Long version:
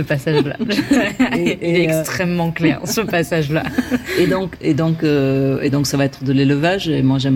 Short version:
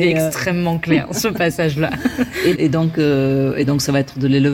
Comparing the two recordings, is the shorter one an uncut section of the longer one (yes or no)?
no